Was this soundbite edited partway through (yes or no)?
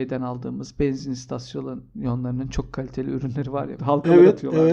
yes